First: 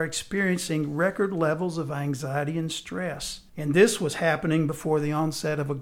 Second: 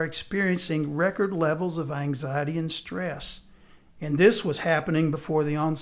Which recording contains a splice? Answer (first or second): first